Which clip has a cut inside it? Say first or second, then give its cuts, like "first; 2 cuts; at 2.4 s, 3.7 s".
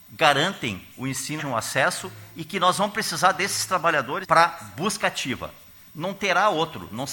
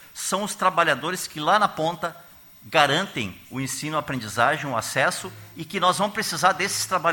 first; 2 cuts; at 1.4 s, 4.2 s